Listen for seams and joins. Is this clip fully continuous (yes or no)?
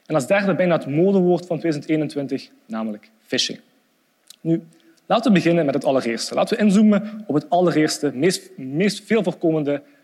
yes